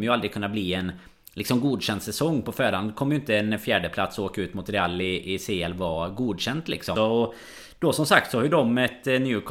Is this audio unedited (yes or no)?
no